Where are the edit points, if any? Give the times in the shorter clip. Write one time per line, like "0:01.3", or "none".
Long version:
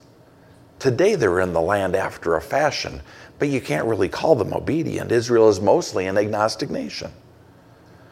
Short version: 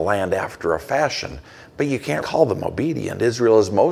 0:02.2